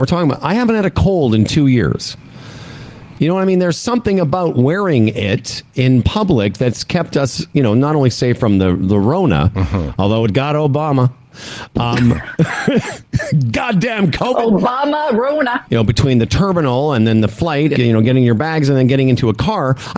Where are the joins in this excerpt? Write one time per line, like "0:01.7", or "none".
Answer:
0:15.7
0:17.8